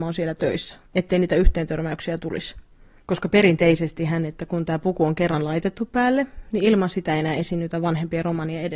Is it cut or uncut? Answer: uncut